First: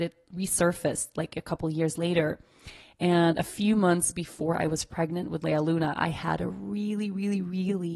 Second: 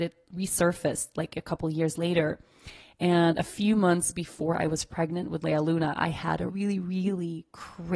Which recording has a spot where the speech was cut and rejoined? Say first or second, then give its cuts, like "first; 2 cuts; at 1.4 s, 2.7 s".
second; 1 cut; at 6.5 s